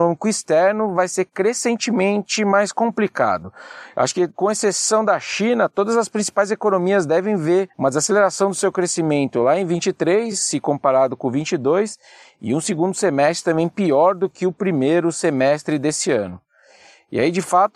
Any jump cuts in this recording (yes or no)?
no